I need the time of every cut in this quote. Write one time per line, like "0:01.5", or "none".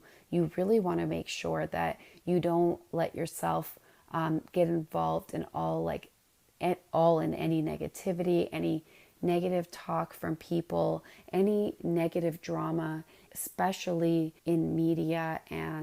0:13.3
0:14.4